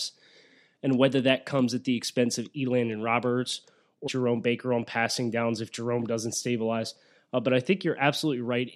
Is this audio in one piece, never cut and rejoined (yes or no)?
no